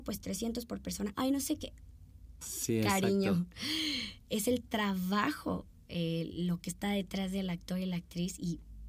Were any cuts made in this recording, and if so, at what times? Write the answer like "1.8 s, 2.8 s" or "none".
1.1 s, 2.4 s